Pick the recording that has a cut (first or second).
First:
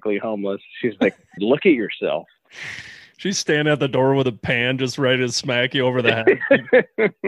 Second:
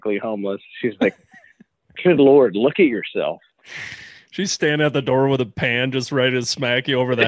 first